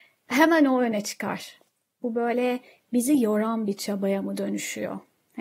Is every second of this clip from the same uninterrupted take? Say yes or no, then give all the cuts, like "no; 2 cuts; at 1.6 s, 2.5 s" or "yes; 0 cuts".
no; 1 cut; at 2.0 s